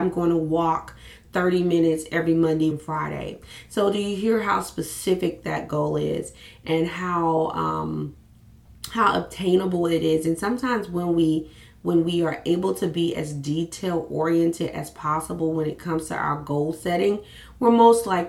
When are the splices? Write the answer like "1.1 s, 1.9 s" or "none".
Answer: 2.7 s